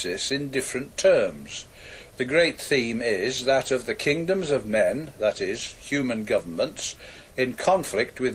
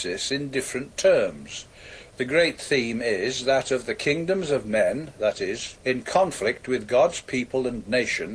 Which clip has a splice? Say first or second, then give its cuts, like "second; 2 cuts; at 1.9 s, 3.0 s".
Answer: second; 1 cut; at 5.8 s